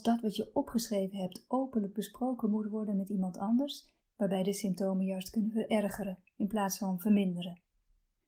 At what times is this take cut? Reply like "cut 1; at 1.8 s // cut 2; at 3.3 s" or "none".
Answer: cut 1; at 4.0 s